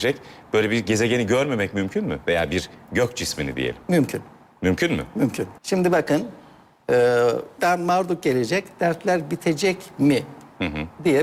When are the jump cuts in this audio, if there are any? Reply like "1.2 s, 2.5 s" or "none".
5.6 s